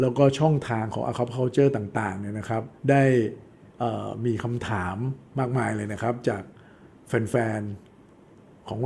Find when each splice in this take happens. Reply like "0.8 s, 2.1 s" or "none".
2.8 s, 5.3 s